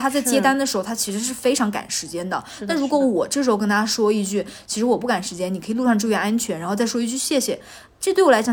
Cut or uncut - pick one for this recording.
uncut